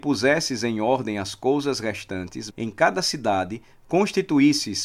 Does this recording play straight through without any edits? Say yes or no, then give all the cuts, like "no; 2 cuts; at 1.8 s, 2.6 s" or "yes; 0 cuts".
no; 1 cut; at 2.5 s